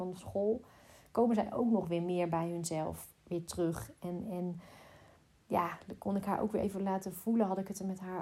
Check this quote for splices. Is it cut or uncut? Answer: uncut